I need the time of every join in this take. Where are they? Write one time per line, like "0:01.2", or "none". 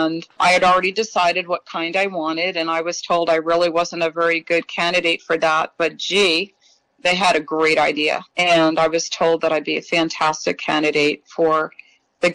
none